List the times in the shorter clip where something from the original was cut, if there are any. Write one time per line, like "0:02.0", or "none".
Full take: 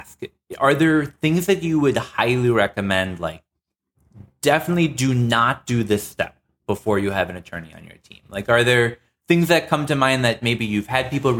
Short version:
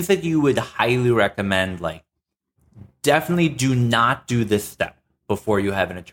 none

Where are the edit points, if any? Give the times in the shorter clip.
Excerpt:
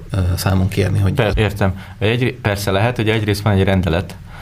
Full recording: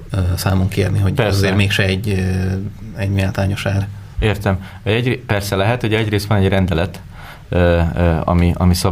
0:01.3

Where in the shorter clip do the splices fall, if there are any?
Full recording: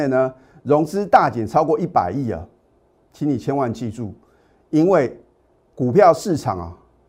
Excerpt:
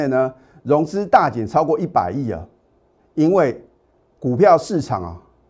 0:03.0

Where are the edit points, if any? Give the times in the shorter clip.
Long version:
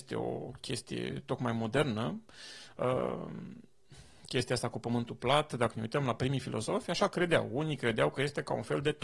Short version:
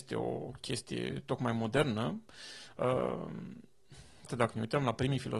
0:04.3

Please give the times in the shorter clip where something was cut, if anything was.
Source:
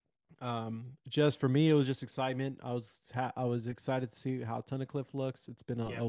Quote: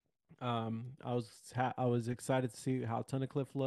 0:01.0

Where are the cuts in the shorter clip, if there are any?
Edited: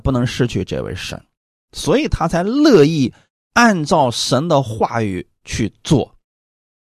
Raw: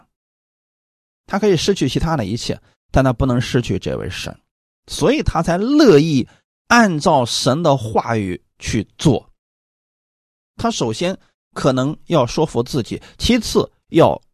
none

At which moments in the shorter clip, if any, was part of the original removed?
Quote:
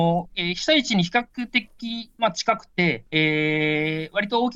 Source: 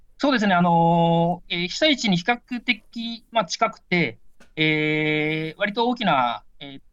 0:03.1

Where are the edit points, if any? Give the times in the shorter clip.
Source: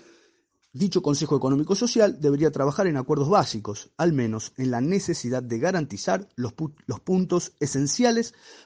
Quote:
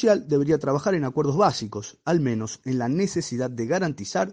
none

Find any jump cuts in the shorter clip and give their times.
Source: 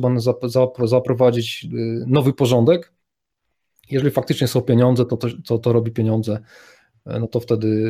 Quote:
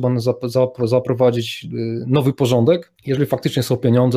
0:03.0

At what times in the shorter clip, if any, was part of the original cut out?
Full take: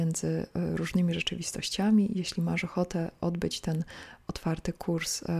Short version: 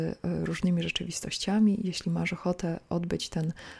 none

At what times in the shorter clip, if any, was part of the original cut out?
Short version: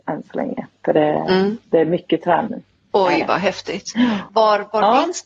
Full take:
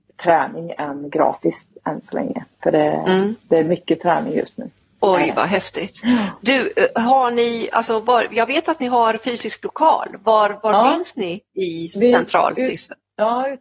0:02.5
0:04.3

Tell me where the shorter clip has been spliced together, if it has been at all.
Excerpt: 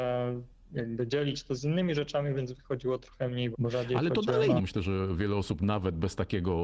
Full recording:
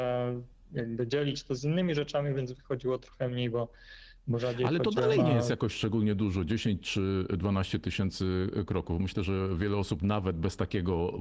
0:03.5
0:04.6

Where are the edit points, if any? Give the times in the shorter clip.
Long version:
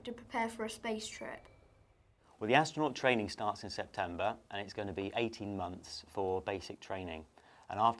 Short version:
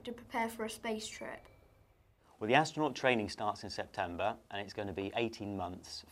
none

